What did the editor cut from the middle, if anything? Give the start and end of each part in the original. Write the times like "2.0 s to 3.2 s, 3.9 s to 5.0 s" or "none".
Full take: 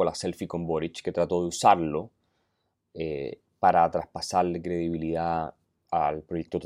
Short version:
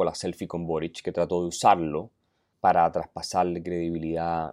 2.5 s to 3.5 s